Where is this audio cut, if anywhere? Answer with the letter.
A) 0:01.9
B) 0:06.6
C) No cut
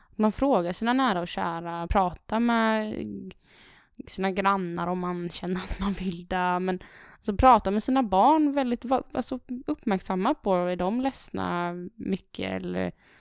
A